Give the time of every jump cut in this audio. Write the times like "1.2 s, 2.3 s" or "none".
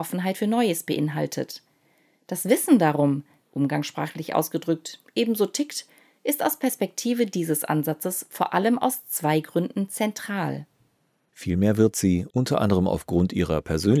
3.4 s, 11.3 s